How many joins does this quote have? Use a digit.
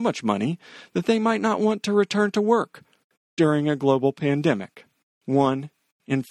1